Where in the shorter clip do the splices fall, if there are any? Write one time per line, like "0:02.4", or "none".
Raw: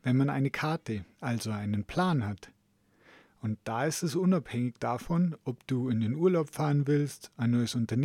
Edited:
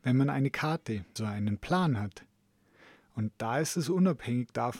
0:01.2